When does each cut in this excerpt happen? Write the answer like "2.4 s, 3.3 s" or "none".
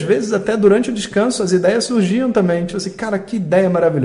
none

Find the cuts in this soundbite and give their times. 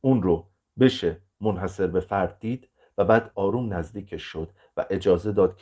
3.3 s

